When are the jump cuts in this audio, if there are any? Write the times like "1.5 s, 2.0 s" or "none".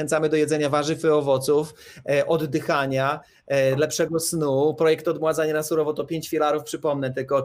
none